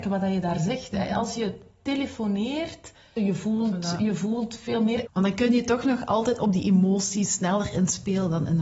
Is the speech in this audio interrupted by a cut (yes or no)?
yes